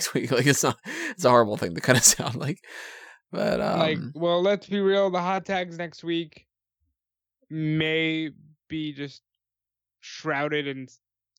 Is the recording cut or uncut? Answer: uncut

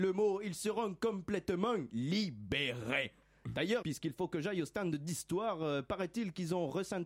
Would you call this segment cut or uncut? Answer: cut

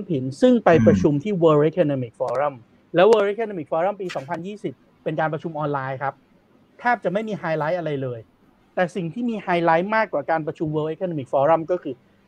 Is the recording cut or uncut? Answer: uncut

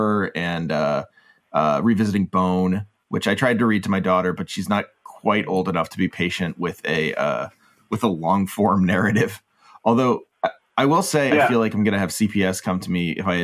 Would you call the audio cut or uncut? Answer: cut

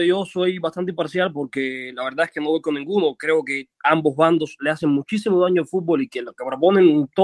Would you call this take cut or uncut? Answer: uncut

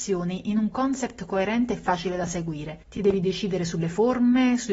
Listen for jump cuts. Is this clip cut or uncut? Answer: uncut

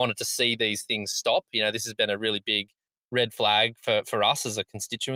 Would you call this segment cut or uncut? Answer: uncut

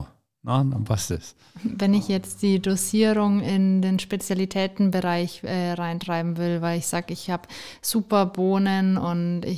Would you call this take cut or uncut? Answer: uncut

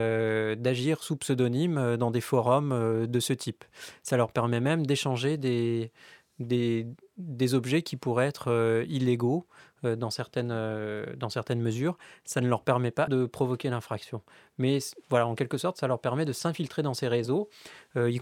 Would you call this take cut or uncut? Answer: cut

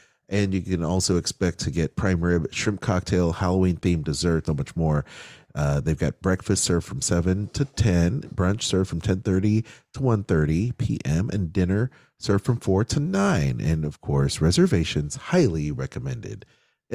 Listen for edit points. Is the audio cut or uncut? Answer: cut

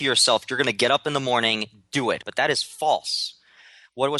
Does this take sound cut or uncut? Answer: cut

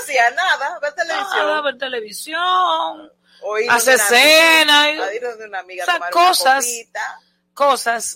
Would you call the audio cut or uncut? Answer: uncut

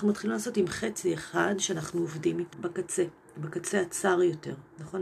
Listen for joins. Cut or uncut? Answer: cut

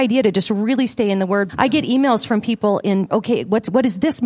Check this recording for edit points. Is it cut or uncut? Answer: cut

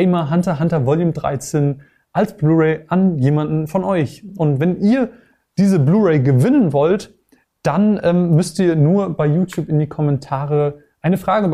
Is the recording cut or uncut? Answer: uncut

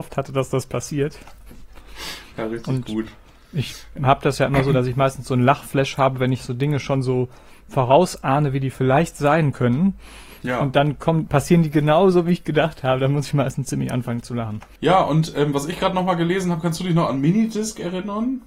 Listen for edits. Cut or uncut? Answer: uncut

